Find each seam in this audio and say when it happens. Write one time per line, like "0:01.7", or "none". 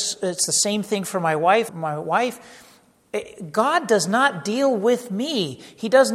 0:01.7